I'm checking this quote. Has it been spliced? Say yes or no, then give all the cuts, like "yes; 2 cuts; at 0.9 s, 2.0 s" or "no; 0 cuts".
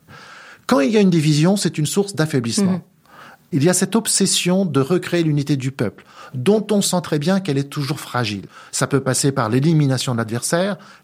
no; 0 cuts